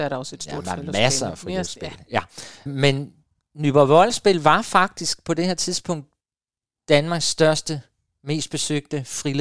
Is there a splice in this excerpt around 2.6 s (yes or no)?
no